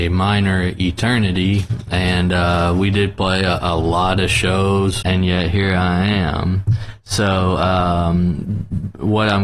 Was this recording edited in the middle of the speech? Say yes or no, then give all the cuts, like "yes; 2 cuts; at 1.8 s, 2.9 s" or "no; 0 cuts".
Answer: yes; 1 cut; at 5.0 s